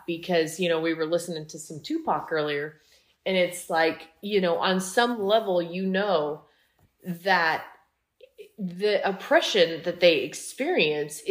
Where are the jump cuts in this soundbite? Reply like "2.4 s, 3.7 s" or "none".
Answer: none